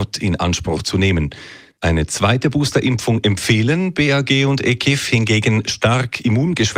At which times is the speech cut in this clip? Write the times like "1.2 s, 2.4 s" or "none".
1.7 s